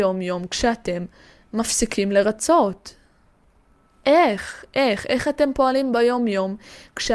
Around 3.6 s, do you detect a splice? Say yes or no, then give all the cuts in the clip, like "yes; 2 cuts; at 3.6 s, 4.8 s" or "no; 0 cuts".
no; 0 cuts